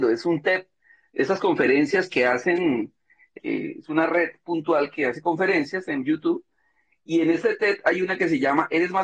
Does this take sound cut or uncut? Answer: cut